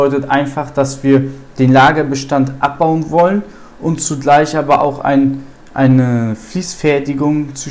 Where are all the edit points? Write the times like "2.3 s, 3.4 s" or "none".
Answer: none